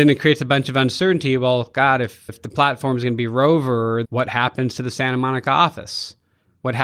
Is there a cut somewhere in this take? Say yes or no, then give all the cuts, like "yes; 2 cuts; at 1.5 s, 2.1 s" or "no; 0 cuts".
yes; 2 cuts; at 2.3 s, 4.0 s